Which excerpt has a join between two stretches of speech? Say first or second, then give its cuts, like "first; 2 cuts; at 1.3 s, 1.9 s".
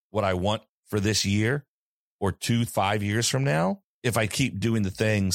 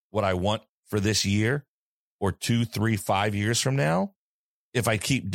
first; 2 cuts; at 2.7 s, 3.9 s